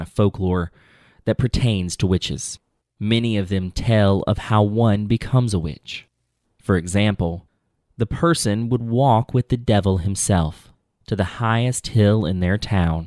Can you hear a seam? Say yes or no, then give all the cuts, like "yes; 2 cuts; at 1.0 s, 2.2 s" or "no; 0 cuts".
yes; 2 cuts; at 2.8 s, 6.4 s